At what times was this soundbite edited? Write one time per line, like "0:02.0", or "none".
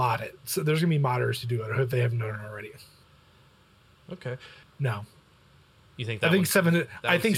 0:04.6